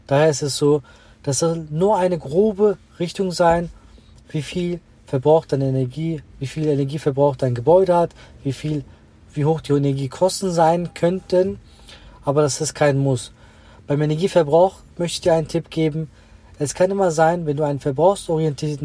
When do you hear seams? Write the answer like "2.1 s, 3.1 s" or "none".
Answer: none